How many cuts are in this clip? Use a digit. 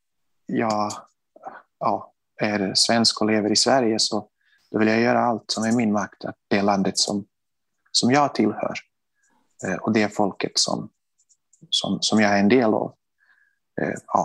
1